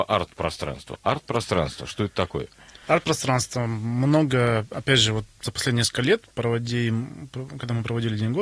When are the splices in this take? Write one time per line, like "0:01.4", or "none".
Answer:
none